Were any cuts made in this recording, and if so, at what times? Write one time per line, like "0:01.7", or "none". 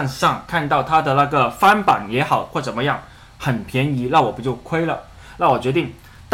none